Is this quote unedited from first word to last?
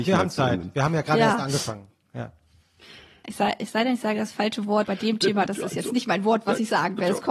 no; 1 cut; at 4.8 s

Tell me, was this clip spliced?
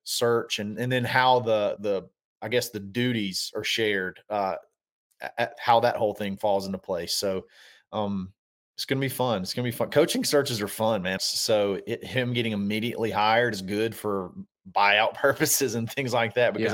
yes; 2 cuts; at 1.8 s, 11.2 s

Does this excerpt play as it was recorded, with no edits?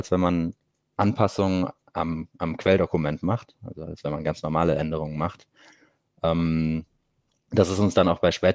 yes; 0 cuts

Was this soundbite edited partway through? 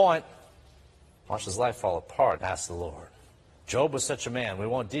yes; 2 cuts; at 1.2 s, 2.4 s

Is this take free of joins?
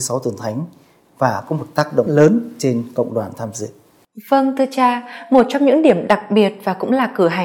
no; 1 cut; at 2.1 s

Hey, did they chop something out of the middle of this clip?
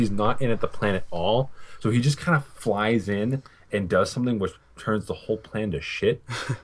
no; 0 cuts

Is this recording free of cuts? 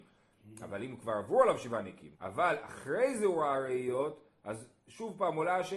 no; 1 cut; at 2.1 s

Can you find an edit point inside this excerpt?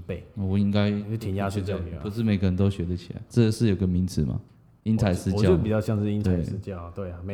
yes; 2 cuts; at 3.3 s, 4.8 s

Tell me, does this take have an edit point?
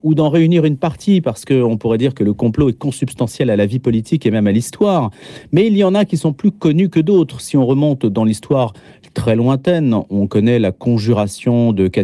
no; 0 cuts

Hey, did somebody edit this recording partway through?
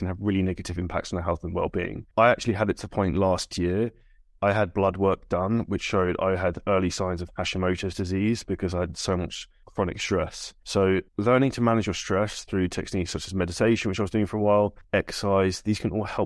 yes; 2 cuts; at 11.1 s, 14.8 s

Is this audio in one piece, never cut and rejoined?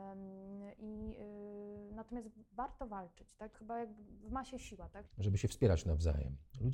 no; 2 cuts; at 3.5 s, 5.1 s

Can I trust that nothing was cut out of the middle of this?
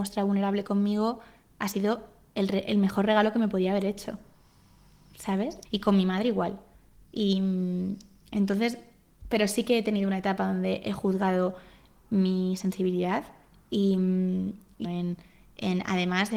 no; 2 cuts; at 5.6 s, 14.8 s

